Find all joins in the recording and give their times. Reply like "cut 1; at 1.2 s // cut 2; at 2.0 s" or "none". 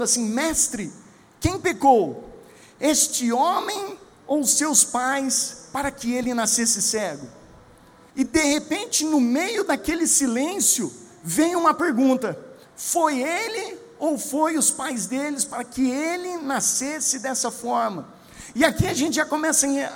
cut 1; at 8.1 s // cut 2; at 12.6 s